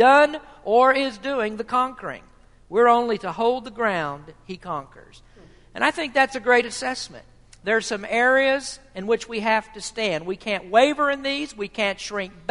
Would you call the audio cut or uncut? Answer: uncut